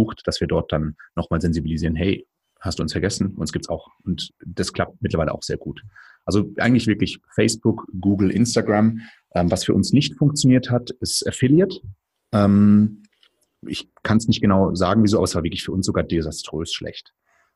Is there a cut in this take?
no; 0 cuts

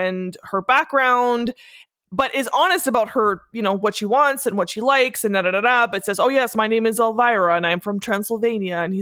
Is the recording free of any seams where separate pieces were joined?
yes; 0 cuts

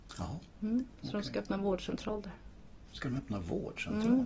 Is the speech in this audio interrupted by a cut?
no; 0 cuts

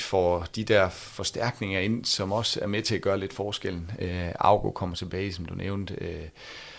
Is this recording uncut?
yes; 0 cuts

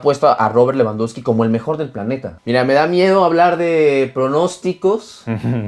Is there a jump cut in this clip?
yes; 1 cut; at 2.4 s

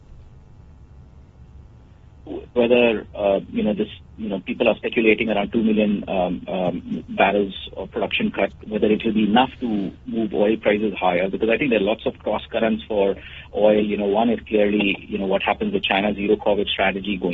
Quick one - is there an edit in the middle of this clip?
yes; 2 cuts; at 2.6 s, 7.7 s

